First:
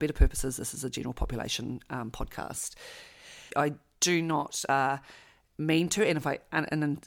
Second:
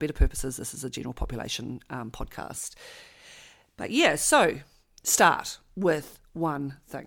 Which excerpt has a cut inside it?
first; 1 cut; at 3.5 s

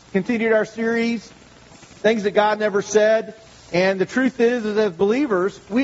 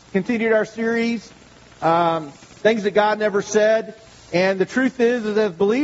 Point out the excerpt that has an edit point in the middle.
first; 1 cut; at 1.7 s

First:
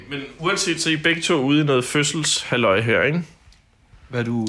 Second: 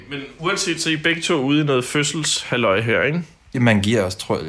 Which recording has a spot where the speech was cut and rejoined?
second; 1 cut; at 3.5 s

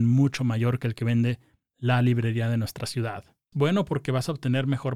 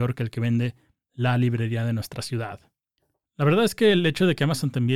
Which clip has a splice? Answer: first; 1 cut; at 3.5 s

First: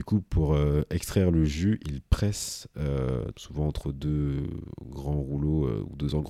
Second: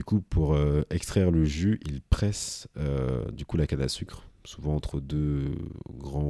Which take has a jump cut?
first; 1 cut; at 3.3 s

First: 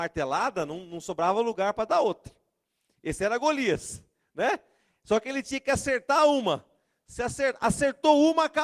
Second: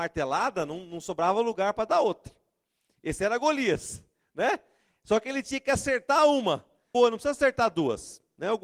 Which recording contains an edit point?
second; 1 cut; at 6.9 s

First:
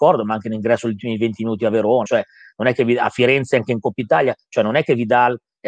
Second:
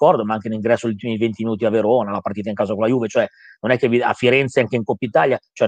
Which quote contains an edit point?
first; 1 cut; at 2.1 s

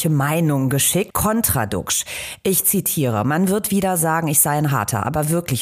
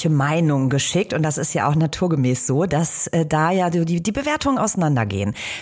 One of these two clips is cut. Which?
first; 1 cut; at 1.1 s

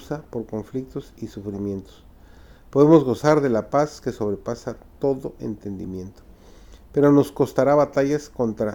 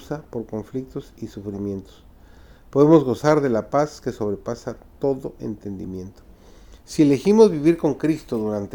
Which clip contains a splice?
second; 1 cut; at 6.8 s

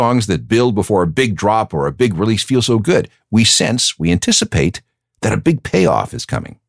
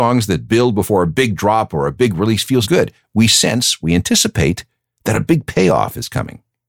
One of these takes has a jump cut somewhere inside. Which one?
second; 1 cut; at 2.6 s

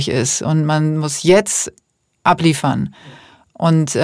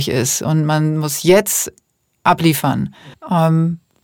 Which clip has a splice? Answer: second; 1 cut; at 3.1 s

